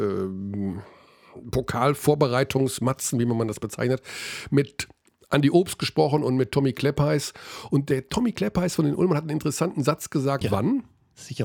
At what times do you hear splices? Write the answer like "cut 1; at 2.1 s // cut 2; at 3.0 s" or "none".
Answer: cut 1; at 10.4 s